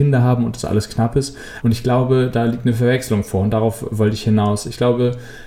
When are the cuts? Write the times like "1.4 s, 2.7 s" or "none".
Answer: 1.6 s